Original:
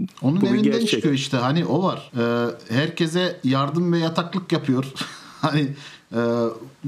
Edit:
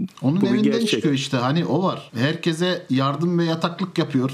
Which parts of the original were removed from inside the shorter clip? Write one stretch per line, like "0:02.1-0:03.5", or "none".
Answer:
0:02.1-0:02.7